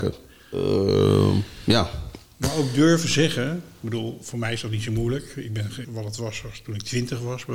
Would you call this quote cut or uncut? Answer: cut